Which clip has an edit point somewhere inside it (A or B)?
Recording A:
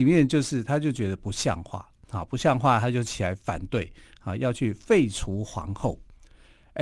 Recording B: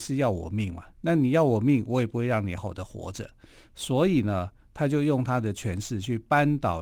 B